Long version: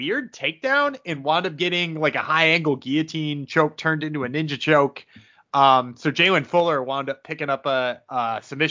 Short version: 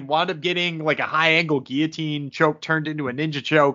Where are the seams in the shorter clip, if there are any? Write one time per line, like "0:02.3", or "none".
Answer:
none